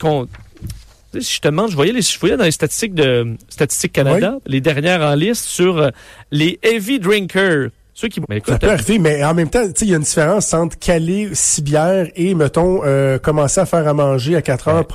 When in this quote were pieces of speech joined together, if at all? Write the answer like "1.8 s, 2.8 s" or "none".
8.2 s